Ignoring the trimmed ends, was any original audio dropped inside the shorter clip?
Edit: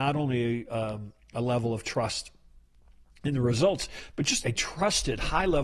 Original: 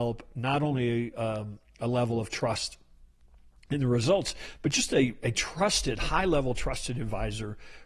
yes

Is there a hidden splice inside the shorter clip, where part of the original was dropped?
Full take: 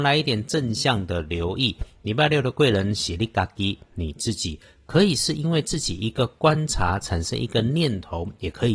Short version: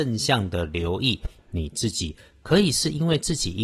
yes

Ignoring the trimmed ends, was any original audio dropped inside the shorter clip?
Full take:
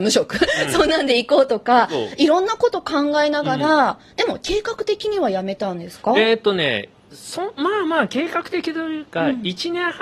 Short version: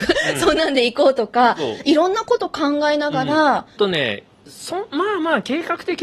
yes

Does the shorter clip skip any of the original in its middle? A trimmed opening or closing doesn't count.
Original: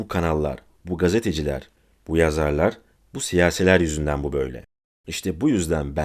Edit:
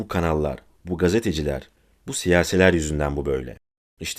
yes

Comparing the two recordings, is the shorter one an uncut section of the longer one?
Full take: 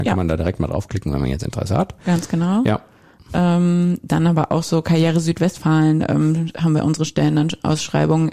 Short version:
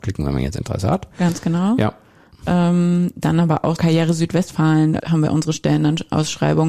no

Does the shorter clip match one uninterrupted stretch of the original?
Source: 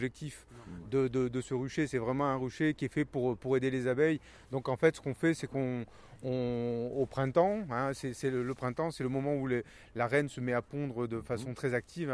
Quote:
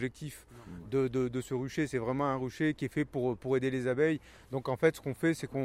yes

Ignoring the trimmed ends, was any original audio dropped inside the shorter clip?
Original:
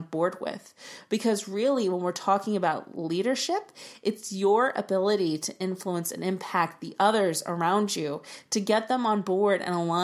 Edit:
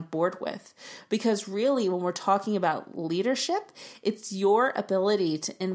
no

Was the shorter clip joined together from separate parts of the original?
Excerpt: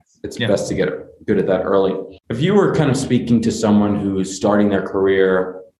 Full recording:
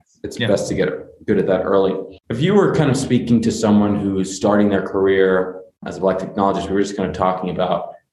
no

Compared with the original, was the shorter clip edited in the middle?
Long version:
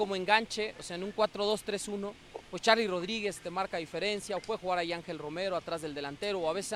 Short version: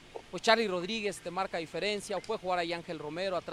no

